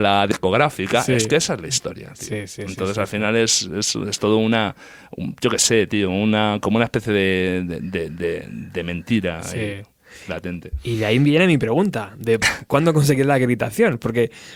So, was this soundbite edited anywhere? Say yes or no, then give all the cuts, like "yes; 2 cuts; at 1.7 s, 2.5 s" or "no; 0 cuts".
no; 0 cuts